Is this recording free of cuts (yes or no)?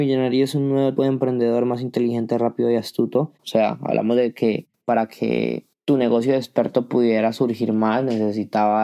no